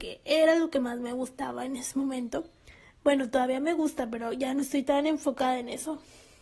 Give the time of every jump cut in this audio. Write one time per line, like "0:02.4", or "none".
none